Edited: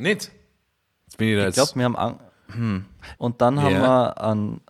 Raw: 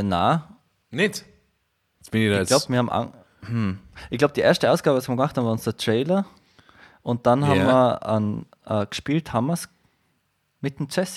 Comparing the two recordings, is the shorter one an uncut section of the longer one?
no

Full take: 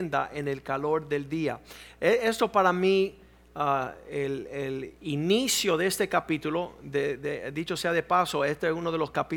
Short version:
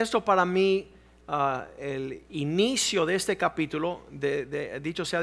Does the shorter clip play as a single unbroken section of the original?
no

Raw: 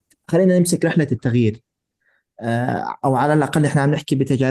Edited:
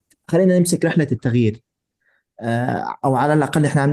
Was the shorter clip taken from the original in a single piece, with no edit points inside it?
yes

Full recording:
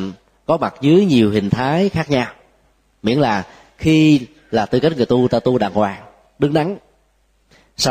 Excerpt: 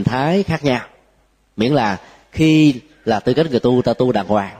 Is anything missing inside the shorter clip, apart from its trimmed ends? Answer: no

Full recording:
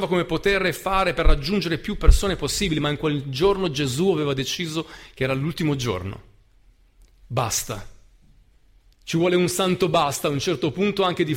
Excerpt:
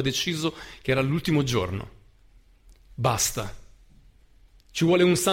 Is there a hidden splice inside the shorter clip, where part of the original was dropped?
no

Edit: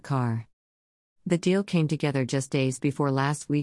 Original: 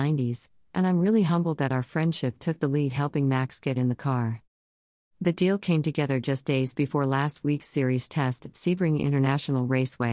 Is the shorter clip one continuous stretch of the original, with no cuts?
yes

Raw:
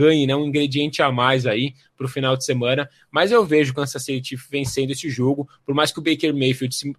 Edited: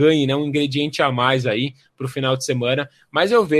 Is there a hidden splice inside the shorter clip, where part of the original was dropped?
no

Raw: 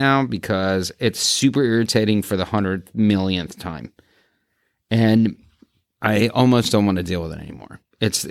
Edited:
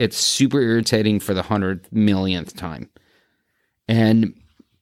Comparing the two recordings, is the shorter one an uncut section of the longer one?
yes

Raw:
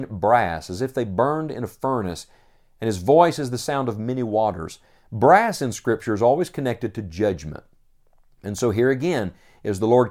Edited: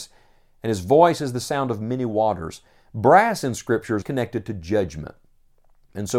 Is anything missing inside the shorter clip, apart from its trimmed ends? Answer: yes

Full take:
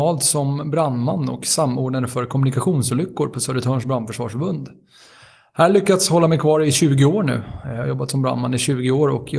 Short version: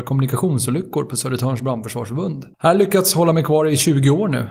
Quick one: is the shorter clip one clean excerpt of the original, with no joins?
no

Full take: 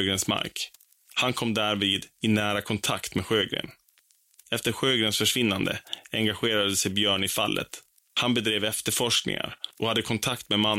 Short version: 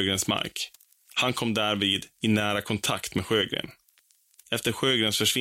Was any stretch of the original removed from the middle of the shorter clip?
no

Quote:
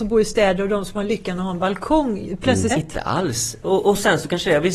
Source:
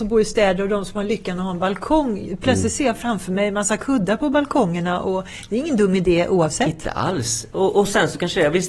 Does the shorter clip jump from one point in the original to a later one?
yes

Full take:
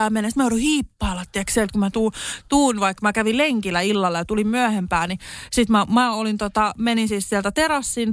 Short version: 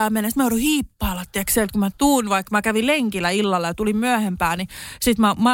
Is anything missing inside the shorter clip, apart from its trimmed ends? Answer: yes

